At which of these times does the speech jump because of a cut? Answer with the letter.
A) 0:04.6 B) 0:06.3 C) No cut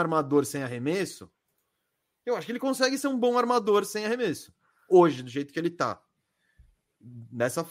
C